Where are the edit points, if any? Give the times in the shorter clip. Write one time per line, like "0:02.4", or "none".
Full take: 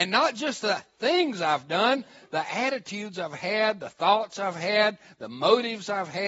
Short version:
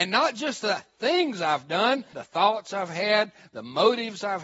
0:02.1